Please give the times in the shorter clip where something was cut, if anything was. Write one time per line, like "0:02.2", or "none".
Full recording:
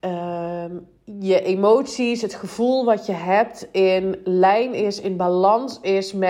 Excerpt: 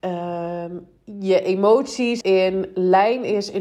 0:02.2